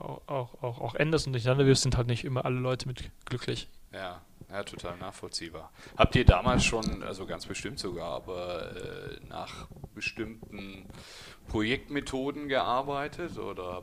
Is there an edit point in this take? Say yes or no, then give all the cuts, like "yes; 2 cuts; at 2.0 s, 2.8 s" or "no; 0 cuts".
no; 0 cuts